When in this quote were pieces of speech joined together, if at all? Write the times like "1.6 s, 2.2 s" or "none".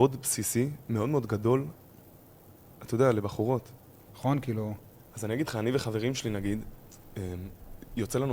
4.1 s

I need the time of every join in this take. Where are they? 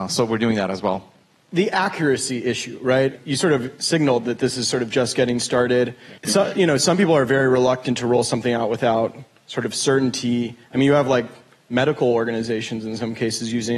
6.2 s

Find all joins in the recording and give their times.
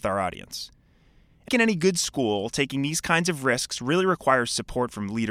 1.5 s

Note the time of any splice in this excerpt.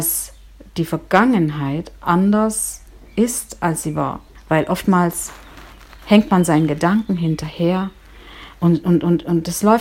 4.3 s

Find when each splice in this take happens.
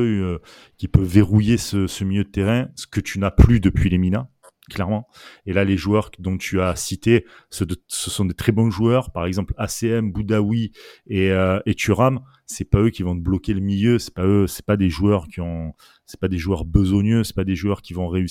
none

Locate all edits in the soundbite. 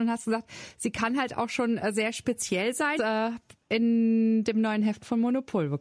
3.0 s

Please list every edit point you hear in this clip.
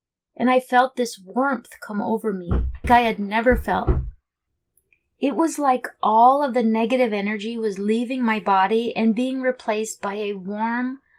2.8 s

